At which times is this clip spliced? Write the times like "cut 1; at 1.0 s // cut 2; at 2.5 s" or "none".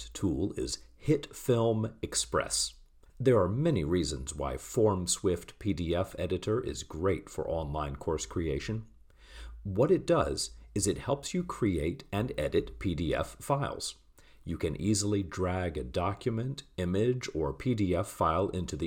cut 1; at 3.1 s